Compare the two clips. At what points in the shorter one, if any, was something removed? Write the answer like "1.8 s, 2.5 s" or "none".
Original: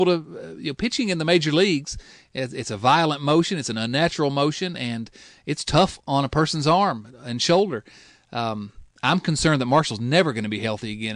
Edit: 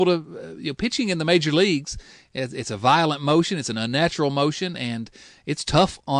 none